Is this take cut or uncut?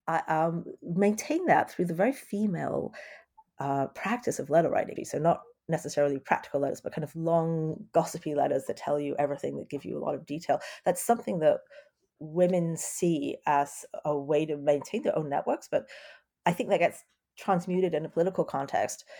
cut